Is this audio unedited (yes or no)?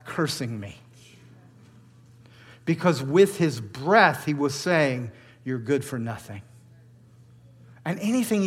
yes